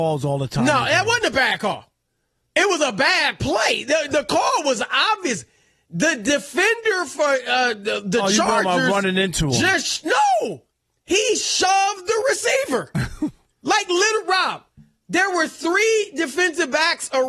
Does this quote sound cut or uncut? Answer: uncut